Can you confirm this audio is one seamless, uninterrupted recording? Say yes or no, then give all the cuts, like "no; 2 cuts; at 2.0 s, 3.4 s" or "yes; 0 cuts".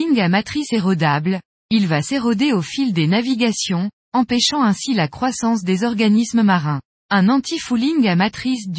no; 1 cut; at 6.9 s